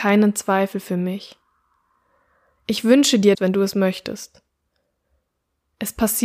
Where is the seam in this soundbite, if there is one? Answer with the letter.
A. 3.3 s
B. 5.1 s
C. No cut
A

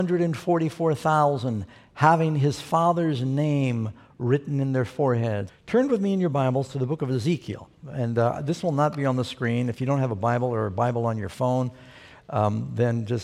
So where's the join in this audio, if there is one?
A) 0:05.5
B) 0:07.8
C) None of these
A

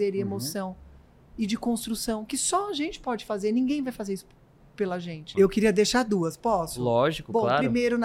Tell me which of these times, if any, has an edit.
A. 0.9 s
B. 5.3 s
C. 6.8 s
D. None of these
B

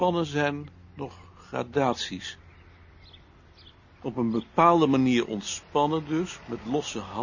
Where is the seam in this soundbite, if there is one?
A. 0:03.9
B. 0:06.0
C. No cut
C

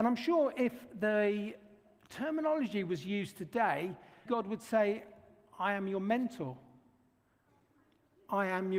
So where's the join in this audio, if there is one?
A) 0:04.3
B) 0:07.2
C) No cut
A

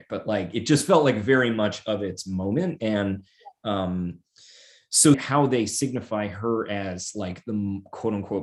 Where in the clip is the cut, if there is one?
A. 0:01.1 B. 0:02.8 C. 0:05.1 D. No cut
C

